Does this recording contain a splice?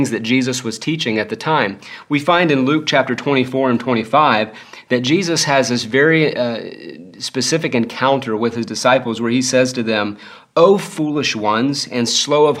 no; 0 cuts

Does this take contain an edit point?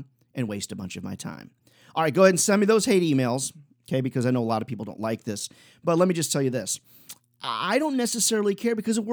no; 0 cuts

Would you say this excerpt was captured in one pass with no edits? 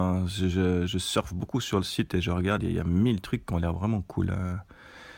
yes; 0 cuts

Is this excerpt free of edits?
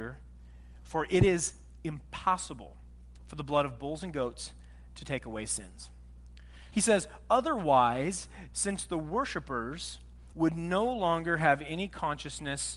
no; 3 cuts; at 6.7 s, 8.5 s, 10.3 s

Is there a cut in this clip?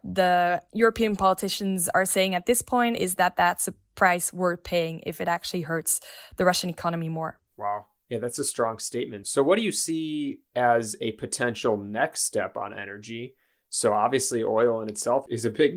yes; 1 cut; at 7.5 s

